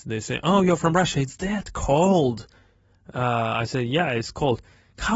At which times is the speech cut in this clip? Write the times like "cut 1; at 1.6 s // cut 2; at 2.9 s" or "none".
none